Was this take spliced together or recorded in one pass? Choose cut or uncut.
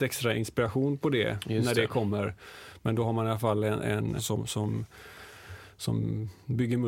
cut